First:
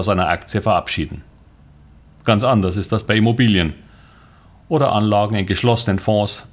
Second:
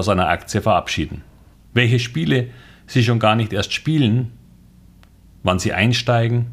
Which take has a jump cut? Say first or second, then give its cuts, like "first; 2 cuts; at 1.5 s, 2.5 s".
second; 1 cut; at 1.5 s